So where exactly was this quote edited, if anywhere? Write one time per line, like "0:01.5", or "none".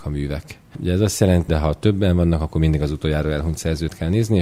0:01.5

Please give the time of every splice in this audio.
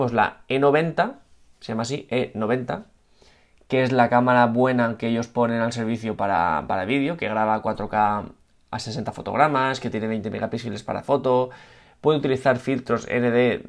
none

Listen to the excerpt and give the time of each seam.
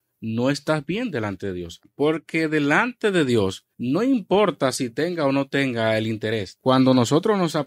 0:01.8
0:03.7
0:06.6

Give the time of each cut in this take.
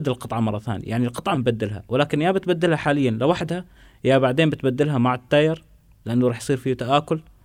0:01.3

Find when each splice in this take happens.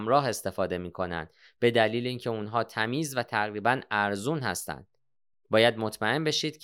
0:05.3

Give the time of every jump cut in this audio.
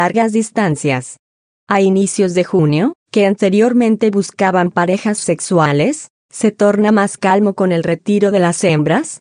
0:03.0

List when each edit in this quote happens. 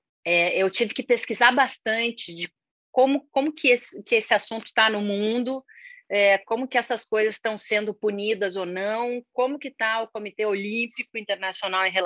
none

